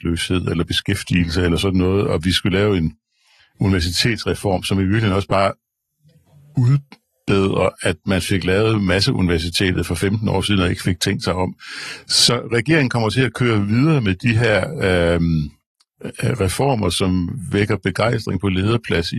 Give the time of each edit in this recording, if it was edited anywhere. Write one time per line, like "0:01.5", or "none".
none